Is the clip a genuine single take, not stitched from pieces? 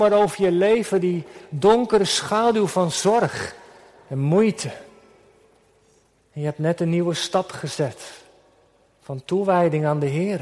yes; 0 cuts

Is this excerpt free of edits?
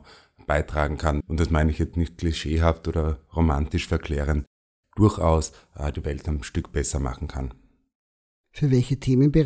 no; 1 cut; at 1.2 s

